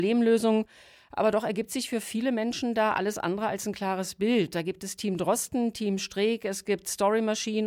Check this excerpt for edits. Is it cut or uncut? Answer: uncut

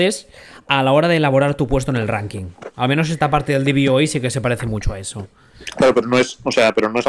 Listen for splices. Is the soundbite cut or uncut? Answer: uncut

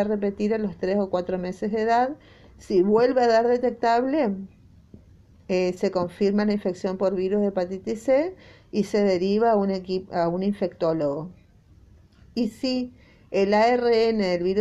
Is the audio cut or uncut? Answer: uncut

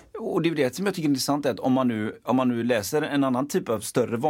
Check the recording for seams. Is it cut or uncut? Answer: uncut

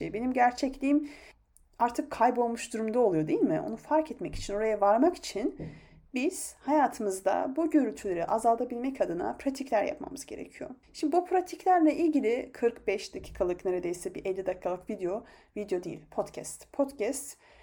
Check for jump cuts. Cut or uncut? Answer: cut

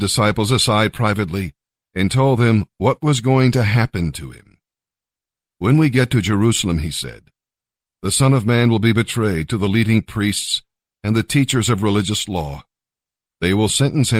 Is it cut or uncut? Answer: uncut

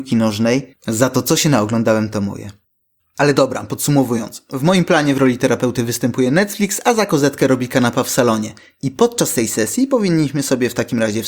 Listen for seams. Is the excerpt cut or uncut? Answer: uncut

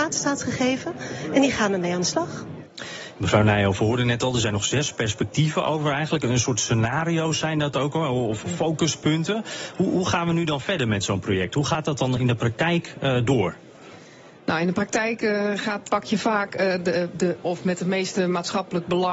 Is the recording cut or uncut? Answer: cut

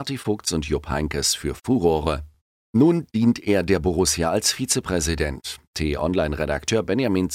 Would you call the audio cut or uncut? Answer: uncut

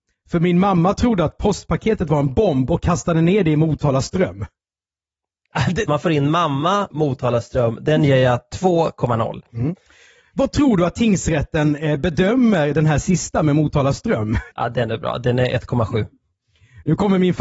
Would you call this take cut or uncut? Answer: cut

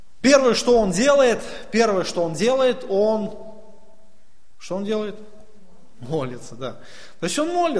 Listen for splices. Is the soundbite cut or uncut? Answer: uncut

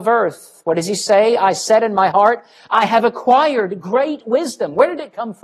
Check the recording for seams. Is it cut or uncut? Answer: uncut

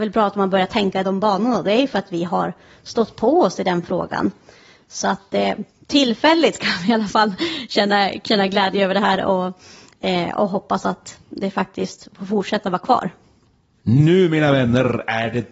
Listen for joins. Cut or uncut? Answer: uncut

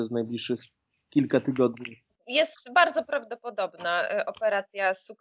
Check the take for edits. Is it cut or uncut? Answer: cut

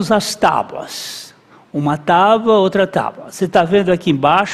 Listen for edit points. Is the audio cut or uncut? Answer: uncut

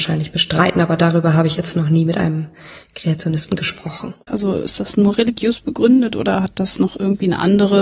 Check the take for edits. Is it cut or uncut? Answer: cut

